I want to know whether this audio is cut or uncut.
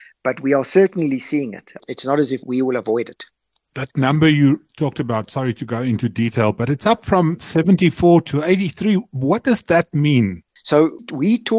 uncut